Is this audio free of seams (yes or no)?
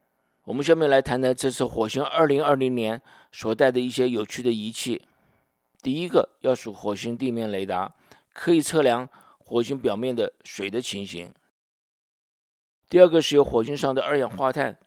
yes